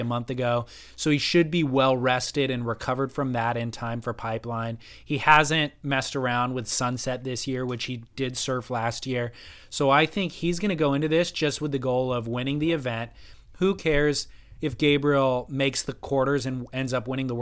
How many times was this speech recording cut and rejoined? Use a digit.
0